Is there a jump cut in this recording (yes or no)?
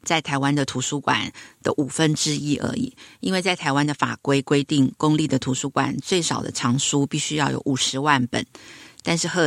no